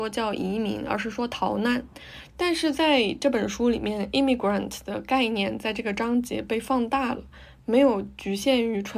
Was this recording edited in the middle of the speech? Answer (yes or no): yes